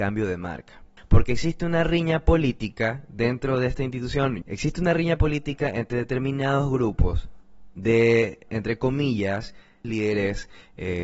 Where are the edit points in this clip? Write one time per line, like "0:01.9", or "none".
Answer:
0:01.0
0:04.4
0:09.8